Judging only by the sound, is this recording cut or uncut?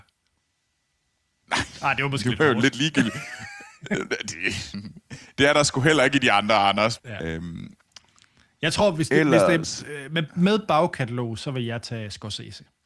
cut